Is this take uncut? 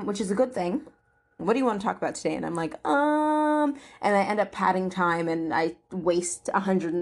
no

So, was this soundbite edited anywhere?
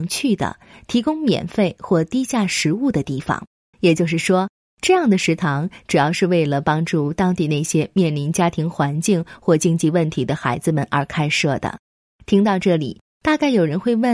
yes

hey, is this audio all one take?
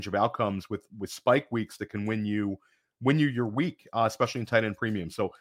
yes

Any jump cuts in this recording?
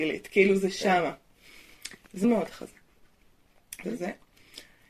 yes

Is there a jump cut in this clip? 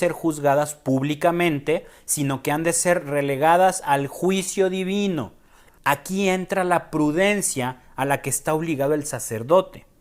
yes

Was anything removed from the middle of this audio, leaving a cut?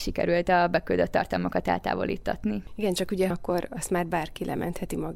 yes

